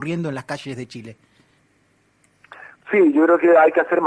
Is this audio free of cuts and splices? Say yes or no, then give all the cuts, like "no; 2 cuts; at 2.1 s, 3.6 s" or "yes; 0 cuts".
yes; 0 cuts